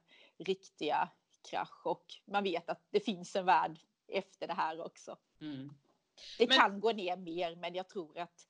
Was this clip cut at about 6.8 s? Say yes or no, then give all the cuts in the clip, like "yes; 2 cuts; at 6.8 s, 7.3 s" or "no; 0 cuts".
no; 2 cuts; at 2.2 s, 5.2 s